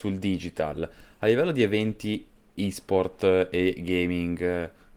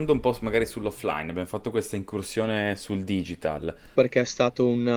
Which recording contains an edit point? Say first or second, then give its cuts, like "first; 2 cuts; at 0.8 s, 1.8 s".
second; 1 cut; at 3.9 s